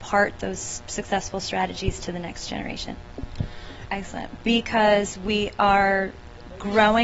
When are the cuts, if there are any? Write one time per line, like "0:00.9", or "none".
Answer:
0:03.9